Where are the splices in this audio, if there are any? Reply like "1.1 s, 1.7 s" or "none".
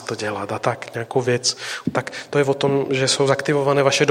1.8 s